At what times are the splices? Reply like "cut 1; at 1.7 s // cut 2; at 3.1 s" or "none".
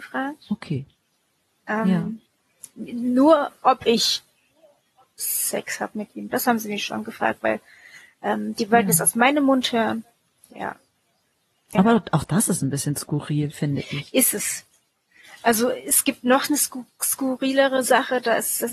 cut 1; at 11.7 s